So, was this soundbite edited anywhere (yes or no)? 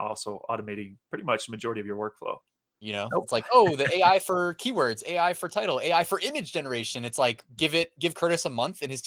yes